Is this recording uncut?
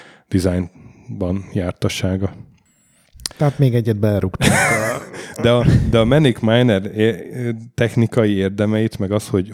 yes; 0 cuts

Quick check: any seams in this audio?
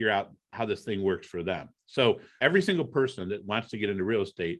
yes; 1 cut; at 2.4 s

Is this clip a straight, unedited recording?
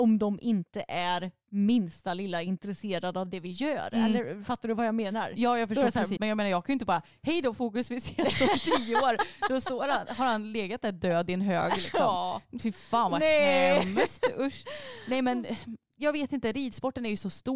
no; 1 cut; at 6.2 s

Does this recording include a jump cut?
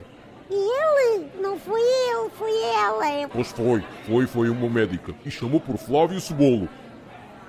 yes; 1 cut; at 3.3 s

